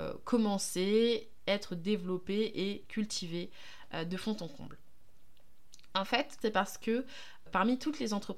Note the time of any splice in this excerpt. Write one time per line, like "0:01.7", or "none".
0:06.4
0:07.5